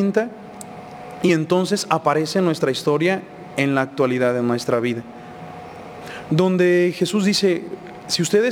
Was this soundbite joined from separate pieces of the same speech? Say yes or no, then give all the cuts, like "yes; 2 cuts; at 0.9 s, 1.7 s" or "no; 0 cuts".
no; 0 cuts